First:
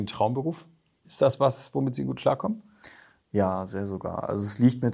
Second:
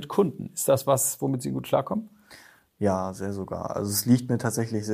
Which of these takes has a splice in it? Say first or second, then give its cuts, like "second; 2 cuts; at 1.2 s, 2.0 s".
first; 1 cut; at 1.0 s